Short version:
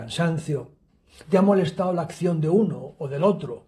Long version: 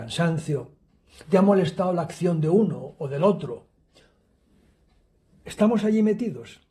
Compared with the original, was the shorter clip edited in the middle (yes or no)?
no